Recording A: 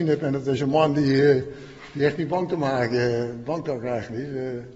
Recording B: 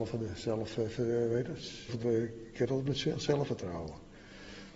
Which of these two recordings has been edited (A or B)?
B